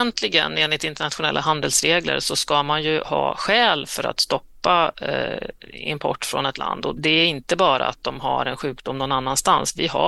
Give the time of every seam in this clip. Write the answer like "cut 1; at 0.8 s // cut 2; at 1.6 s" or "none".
cut 1; at 7.0 s